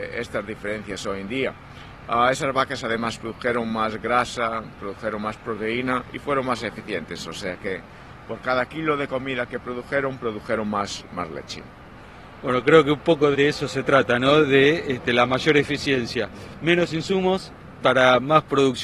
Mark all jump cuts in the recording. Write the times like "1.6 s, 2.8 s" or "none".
13.3 s